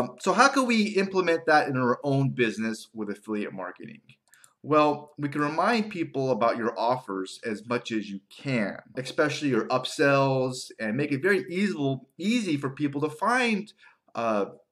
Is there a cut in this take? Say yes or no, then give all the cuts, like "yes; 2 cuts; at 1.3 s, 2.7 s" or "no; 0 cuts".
yes; 1 cut; at 8.9 s